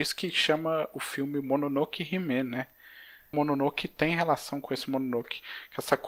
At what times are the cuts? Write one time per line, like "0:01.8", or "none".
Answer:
0:03.3

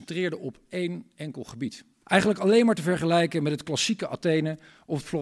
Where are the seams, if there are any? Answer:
0:02.0

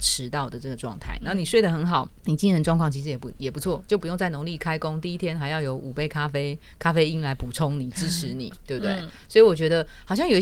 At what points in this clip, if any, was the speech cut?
0:02.2

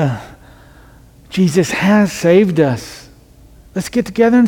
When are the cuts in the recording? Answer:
none

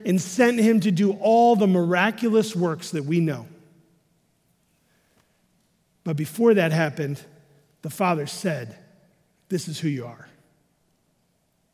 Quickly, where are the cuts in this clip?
none

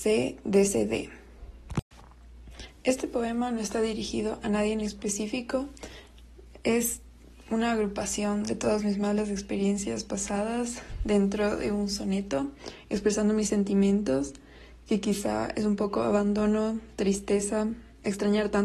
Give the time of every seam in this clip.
none

